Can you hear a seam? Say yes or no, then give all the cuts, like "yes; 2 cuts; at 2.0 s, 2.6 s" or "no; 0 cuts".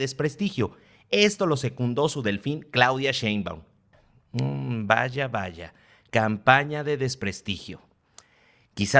no; 0 cuts